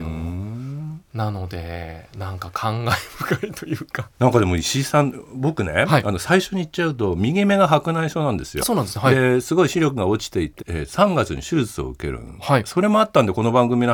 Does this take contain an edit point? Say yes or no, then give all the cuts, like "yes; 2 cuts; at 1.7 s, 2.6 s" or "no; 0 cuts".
yes; 3 cuts; at 4.1 s, 8.6 s, 10.6 s